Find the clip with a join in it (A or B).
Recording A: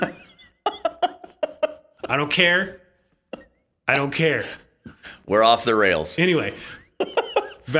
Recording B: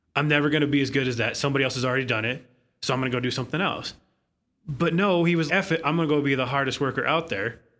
B